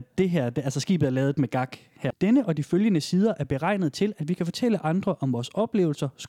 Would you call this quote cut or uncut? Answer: cut